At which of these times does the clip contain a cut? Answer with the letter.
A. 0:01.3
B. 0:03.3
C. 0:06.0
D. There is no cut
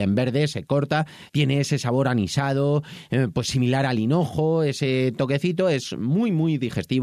A